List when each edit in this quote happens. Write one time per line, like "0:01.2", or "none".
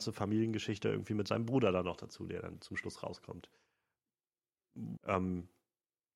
0:05.0